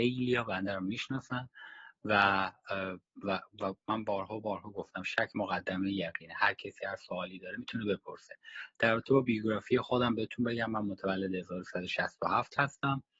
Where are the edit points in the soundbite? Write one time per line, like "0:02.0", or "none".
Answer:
none